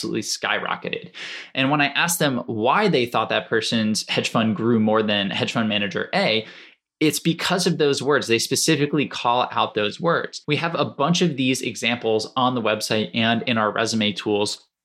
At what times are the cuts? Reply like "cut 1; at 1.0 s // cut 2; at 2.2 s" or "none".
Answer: cut 1; at 10.4 s